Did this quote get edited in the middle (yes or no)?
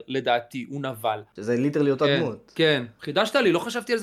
yes